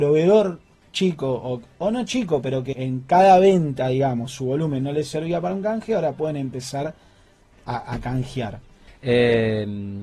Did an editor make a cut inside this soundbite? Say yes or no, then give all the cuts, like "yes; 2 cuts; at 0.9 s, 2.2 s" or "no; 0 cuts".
yes; 2 cuts; at 2.7 s, 8.9 s